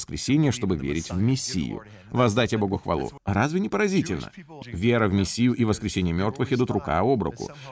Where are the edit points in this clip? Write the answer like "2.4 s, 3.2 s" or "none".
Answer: 3.2 s, 4.6 s